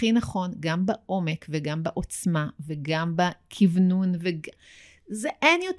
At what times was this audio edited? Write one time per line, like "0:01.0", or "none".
none